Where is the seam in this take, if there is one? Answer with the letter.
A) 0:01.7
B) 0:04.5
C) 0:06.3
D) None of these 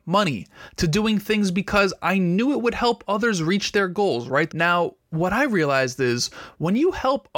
B